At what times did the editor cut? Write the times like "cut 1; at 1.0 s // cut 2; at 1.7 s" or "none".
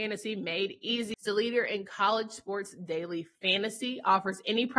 cut 1; at 1.1 s